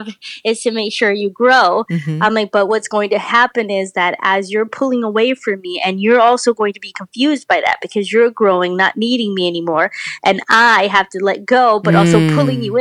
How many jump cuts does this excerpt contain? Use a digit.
0